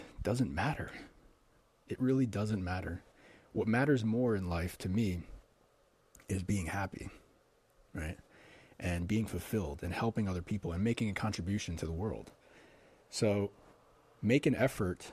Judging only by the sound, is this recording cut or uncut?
uncut